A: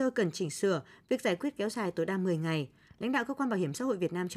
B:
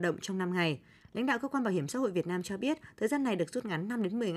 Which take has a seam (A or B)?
B